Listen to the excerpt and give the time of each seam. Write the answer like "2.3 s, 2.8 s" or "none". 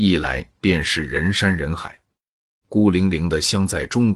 2.6 s

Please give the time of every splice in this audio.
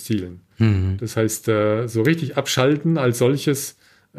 none

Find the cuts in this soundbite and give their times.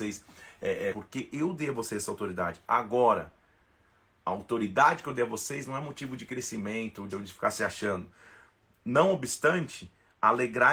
0.9 s, 7.1 s

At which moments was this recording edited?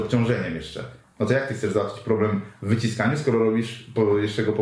none

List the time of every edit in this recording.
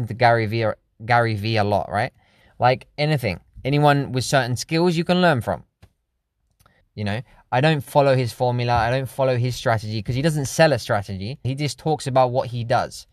2.4 s, 6.8 s, 11.4 s

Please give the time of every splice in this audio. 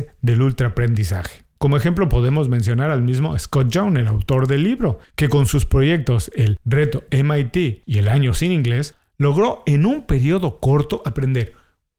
none

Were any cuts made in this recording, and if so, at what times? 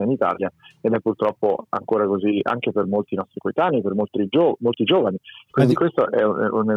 5.5 s

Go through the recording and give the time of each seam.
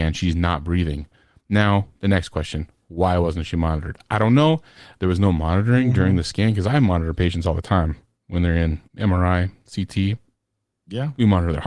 5.0 s, 8.9 s

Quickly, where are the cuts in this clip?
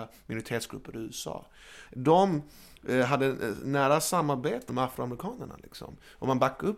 1.9 s, 4.7 s

